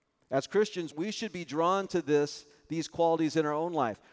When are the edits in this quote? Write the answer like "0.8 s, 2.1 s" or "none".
0.9 s